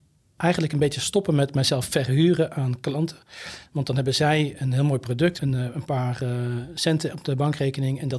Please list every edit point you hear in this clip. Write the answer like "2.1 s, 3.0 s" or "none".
5.4 s